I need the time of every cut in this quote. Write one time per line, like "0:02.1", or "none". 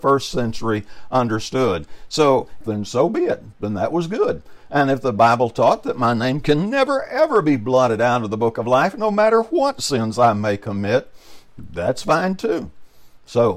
0:02.6